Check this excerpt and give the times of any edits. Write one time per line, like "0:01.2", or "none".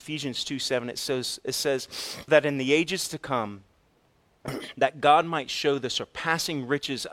0:02.3